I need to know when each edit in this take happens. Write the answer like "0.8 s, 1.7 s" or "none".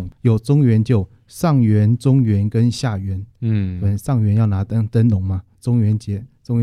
none

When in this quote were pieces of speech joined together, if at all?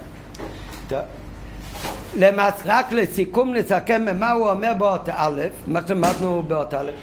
2.6 s

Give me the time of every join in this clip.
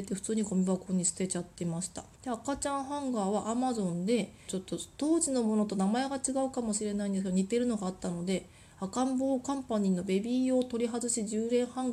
2.1 s, 4.5 s

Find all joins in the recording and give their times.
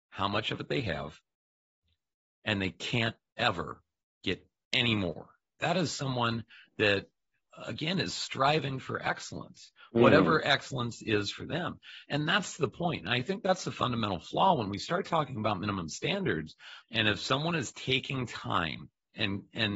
5.6 s, 16.8 s

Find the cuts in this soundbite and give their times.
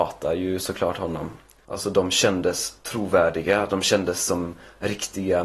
1.6 s

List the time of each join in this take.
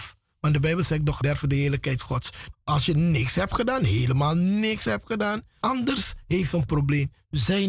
1.2 s, 2.5 s, 5.6 s

